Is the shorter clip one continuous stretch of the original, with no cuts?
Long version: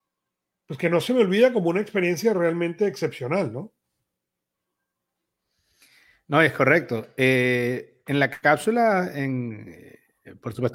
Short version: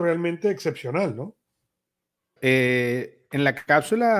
no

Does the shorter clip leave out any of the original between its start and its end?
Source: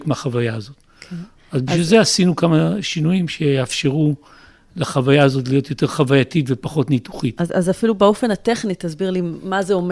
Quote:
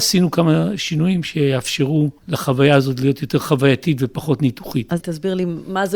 yes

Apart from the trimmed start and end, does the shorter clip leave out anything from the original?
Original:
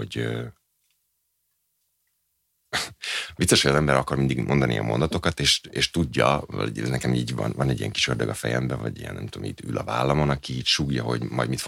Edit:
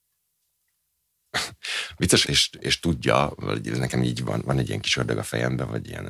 yes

